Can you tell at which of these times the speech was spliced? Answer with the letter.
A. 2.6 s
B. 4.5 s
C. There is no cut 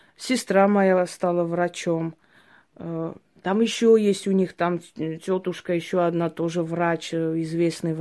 C